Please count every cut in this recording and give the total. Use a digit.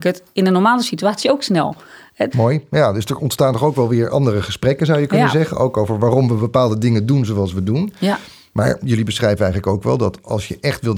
1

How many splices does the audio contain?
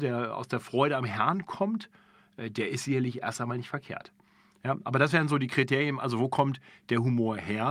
0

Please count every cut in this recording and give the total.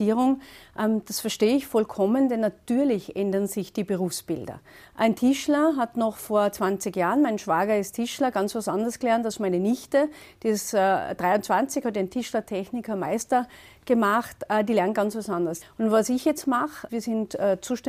3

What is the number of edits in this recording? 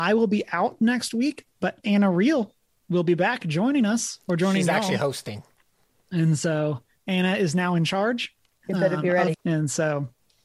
1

